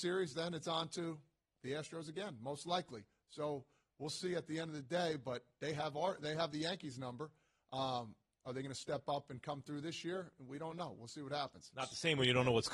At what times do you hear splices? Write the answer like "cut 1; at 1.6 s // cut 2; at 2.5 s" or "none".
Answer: none